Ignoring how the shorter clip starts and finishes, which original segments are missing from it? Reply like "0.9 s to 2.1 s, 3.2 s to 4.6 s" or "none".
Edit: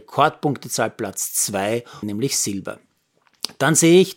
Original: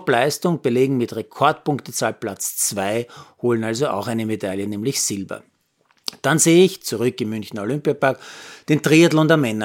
3.3 s to 4.7 s